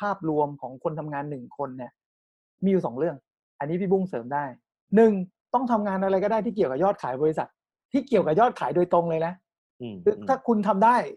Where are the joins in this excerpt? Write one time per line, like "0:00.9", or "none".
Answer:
none

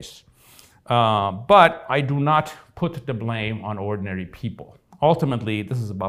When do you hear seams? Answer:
none

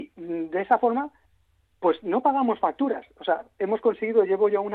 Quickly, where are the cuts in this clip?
none

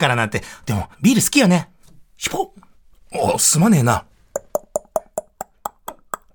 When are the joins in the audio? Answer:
0:00.9

